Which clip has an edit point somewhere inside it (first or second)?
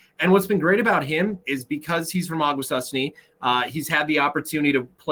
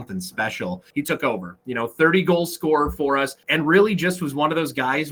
second